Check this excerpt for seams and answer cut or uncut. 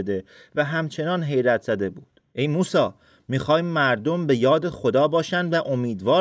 cut